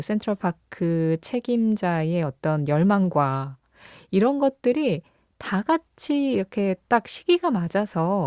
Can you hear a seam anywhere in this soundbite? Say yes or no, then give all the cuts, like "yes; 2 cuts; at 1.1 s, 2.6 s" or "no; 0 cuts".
no; 0 cuts